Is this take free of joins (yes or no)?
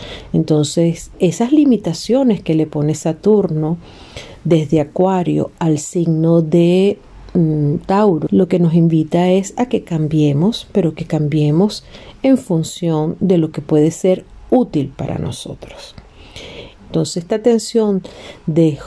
no